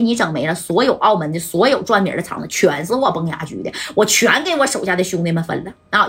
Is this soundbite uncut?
yes; 0 cuts

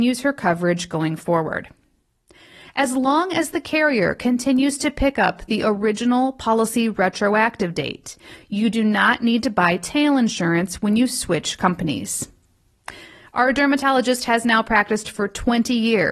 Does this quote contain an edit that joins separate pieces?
no; 0 cuts

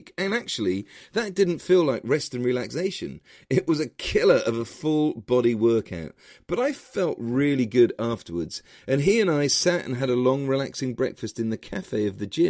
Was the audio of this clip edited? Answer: no; 0 cuts

